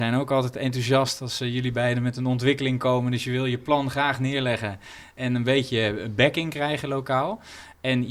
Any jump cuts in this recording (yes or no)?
no